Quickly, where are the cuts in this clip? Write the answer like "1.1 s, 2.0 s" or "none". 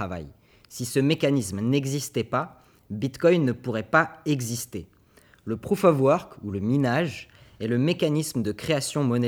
none